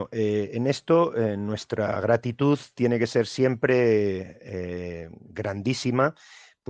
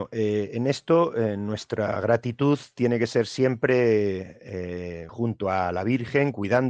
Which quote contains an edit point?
second; 1 cut; at 5.1 s

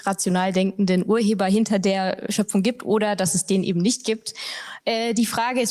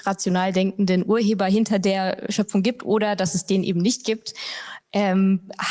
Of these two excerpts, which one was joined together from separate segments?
first; 1 cut; at 4.8 s

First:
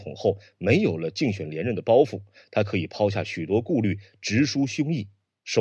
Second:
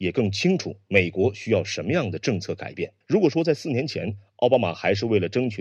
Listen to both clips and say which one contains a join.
second; 1 cut; at 3.0 s

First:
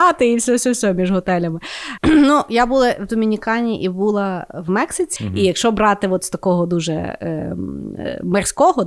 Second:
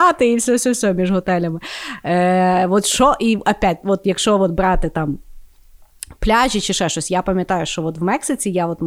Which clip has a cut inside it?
first; 2 cuts; at 2.0 s, 5.2 s

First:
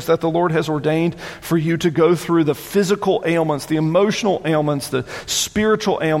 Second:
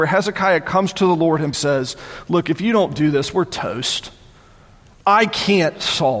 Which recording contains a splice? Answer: second; 1 cut; at 1.5 s

